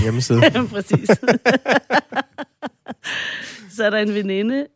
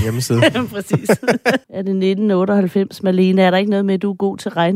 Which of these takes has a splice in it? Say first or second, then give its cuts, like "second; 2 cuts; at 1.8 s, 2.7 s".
second; 1 cut; at 1.6 s